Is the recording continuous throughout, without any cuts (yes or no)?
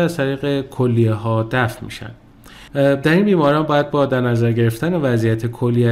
no